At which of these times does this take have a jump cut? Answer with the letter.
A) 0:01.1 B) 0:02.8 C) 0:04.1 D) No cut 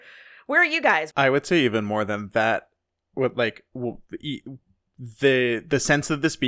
A